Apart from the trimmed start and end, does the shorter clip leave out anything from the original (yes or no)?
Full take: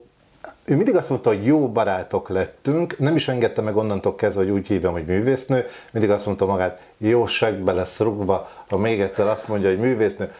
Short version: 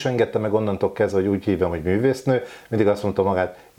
no